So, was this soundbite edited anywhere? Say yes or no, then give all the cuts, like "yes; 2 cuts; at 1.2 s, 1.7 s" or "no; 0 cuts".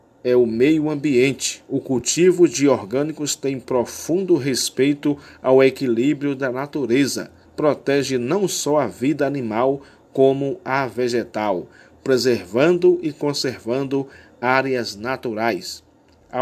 yes; 1 cut; at 7.4 s